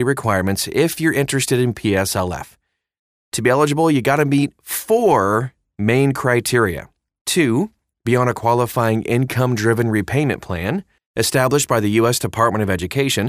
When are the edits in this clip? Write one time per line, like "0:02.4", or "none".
0:07.2
0:11.0